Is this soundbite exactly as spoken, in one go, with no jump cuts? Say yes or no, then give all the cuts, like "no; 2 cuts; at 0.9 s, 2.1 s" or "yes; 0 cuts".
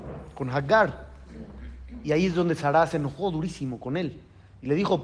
yes; 0 cuts